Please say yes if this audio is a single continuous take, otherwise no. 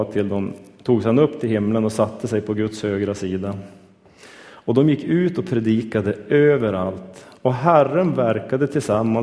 yes